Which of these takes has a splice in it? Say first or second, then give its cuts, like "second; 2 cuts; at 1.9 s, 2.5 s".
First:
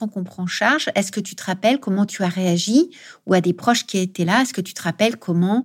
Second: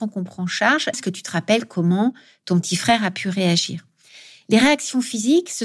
second; 1 cut; at 0.9 s